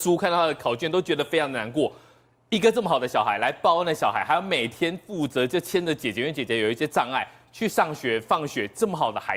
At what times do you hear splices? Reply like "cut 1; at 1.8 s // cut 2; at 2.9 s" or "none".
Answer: none